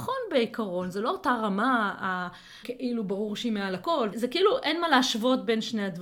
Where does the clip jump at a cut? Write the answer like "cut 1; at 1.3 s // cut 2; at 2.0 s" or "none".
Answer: cut 1; at 2.6 s // cut 2; at 4.1 s